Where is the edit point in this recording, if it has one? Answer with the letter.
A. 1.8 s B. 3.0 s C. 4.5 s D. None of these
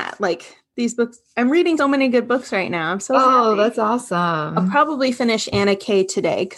A